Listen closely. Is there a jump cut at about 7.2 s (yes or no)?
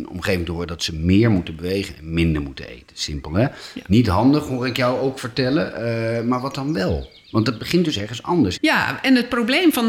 no